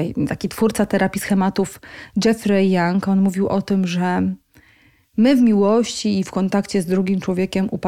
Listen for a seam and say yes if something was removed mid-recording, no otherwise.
no